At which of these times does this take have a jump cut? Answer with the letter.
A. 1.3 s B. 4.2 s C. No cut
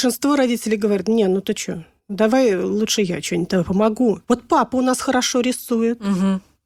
B